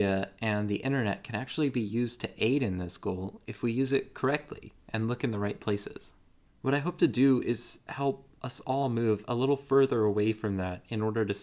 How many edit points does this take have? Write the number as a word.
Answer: one